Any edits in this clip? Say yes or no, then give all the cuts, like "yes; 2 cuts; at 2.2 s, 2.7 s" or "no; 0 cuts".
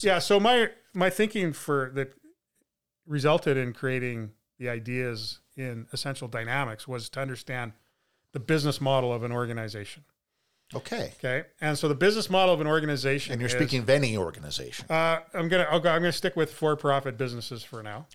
no; 0 cuts